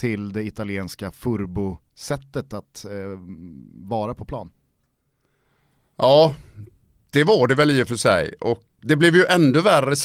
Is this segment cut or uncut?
cut